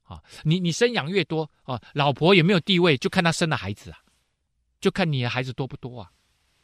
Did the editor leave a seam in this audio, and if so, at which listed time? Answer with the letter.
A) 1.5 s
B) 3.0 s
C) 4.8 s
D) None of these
C